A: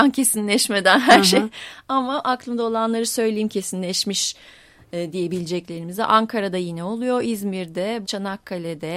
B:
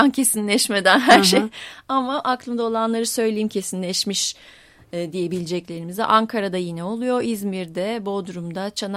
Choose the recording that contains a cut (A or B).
A